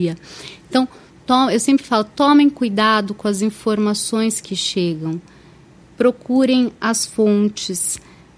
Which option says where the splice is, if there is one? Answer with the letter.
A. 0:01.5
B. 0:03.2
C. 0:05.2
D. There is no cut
D